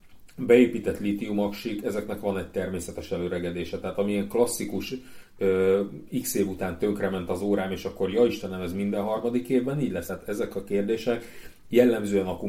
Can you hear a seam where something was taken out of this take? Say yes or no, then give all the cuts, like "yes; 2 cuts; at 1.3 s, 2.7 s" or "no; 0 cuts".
no; 0 cuts